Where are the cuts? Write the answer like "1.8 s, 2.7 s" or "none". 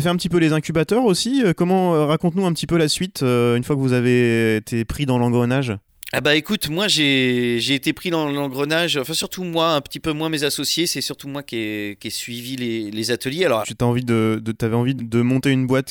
13.6 s, 15.0 s